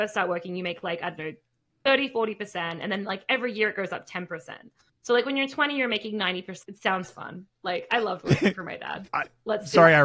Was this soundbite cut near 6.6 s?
yes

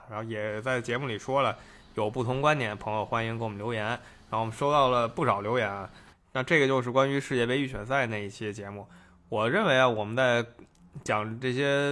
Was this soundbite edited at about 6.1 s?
yes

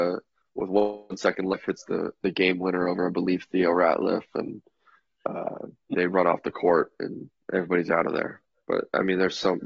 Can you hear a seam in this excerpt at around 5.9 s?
yes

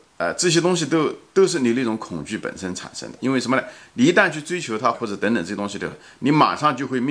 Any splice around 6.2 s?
no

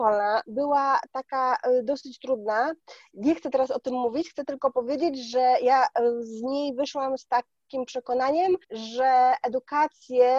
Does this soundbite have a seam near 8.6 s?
yes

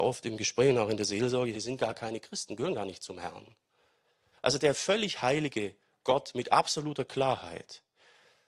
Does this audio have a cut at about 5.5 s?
no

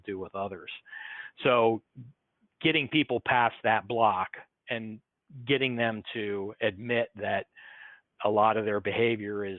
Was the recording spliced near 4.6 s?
yes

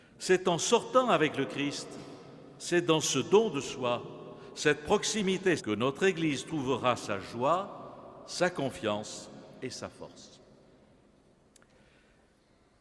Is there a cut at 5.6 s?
yes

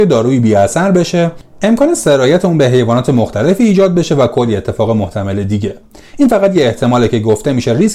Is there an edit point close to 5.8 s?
no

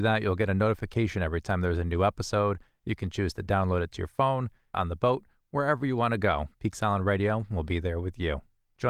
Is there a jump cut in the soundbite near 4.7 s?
yes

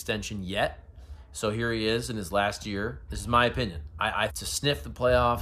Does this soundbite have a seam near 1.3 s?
no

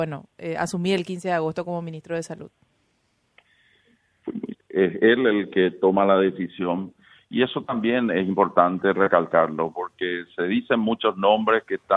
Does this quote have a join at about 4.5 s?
yes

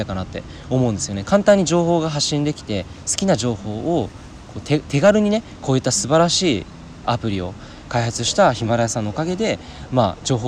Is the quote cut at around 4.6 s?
no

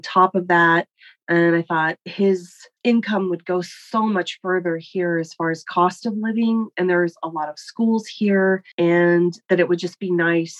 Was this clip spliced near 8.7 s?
yes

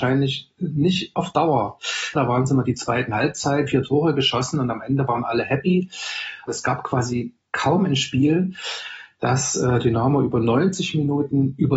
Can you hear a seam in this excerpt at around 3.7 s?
yes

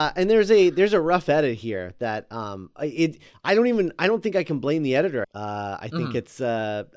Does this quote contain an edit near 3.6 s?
no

